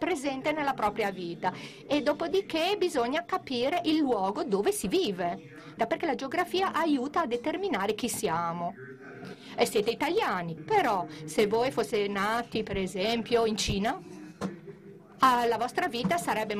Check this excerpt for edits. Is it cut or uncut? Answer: cut